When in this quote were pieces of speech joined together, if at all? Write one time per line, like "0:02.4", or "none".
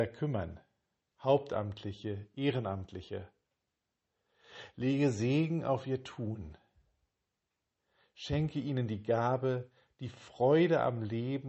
none